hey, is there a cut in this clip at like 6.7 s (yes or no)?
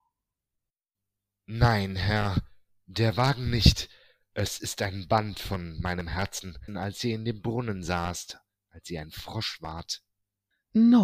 yes